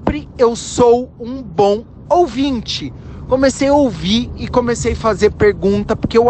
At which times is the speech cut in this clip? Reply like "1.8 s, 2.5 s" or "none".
none